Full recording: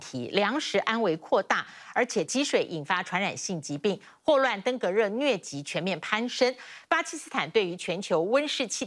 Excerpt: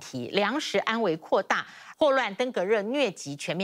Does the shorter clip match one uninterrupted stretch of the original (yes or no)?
no